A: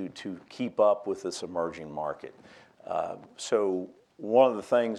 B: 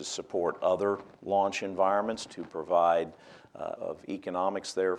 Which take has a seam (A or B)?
B